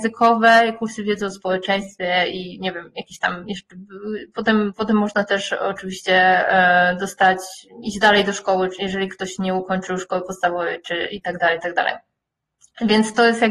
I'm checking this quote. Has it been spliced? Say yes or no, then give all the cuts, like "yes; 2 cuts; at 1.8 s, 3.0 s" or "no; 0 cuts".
no; 0 cuts